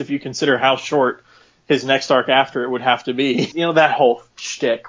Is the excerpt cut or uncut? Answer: cut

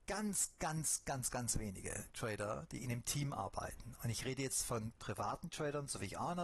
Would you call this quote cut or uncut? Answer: uncut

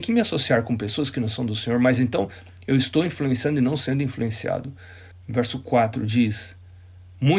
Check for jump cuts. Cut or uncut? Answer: cut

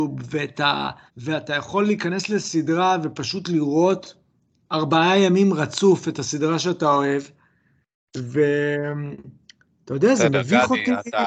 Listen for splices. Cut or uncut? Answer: cut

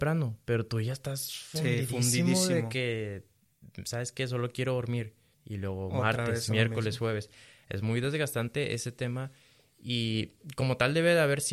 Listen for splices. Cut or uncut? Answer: cut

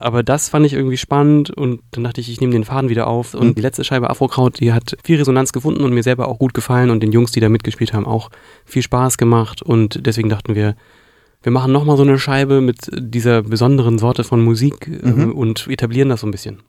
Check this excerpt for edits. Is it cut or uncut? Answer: cut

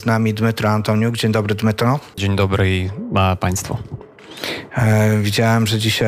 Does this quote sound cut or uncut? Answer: cut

